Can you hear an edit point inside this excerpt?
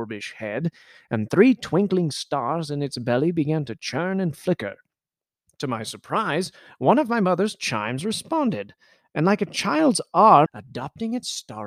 yes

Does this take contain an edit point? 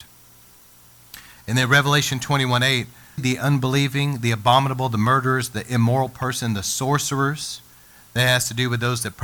yes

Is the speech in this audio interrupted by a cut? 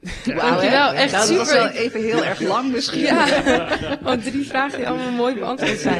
no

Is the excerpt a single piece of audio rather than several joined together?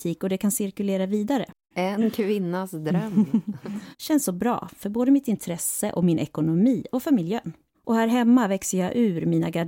no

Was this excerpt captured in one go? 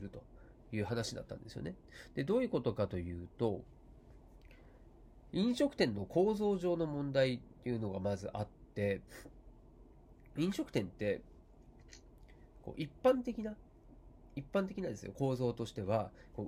yes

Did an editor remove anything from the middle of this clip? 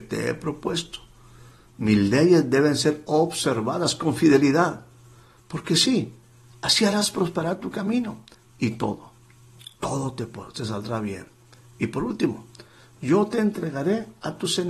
no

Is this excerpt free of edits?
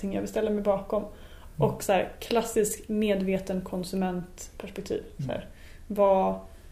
yes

